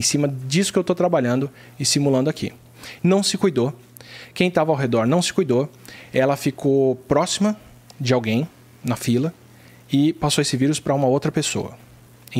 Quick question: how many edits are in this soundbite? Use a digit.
1